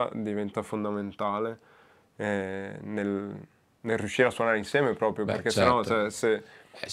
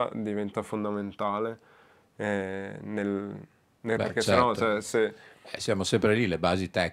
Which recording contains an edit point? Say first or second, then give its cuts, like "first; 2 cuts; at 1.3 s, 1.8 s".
second; 1 cut; at 4.0 s